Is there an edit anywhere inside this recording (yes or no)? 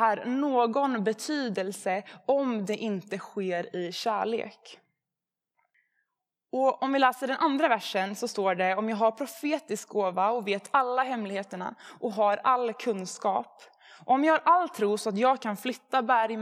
no